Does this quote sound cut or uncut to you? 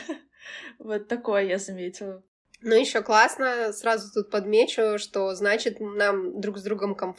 uncut